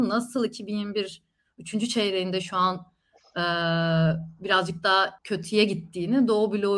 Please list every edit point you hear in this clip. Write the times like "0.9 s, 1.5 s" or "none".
5.2 s